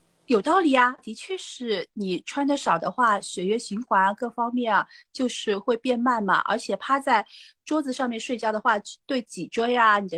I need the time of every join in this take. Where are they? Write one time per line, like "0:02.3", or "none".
0:01.0

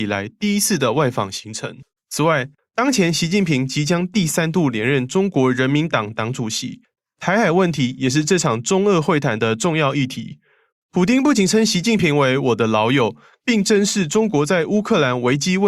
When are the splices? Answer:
0:02.0
0:10.7
0:13.4

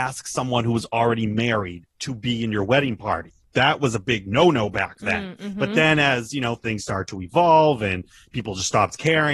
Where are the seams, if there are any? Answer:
0:03.5

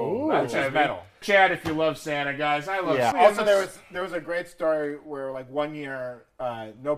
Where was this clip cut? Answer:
0:01.2
0:03.1

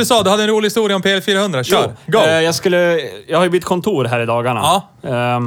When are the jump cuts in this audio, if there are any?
none

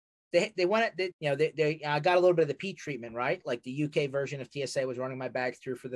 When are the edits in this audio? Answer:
0:01.1

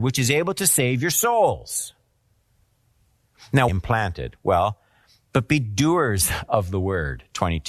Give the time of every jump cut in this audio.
0:03.7

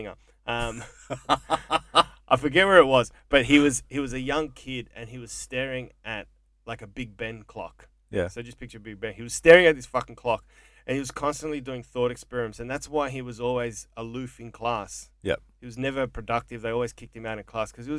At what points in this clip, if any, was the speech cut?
none

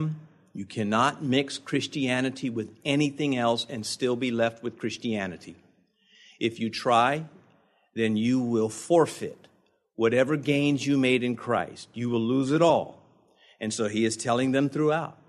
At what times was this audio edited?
none

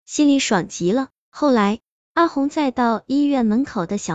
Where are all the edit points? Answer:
none

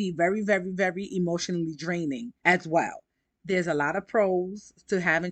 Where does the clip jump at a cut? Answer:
0:02.4

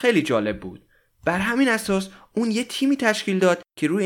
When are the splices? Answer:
none

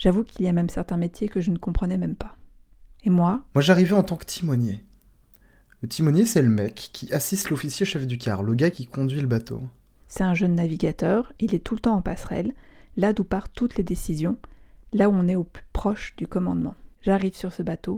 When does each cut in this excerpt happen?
none

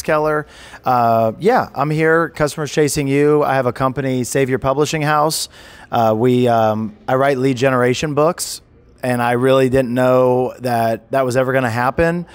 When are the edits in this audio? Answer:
none

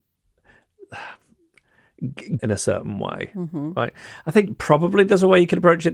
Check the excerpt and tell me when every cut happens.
0:02.4

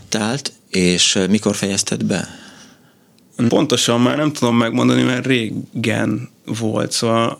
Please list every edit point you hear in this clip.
0:03.5

